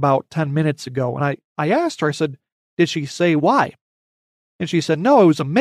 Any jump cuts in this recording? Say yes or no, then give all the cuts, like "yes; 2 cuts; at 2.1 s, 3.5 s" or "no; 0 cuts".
no; 0 cuts